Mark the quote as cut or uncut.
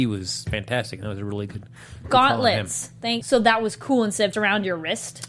cut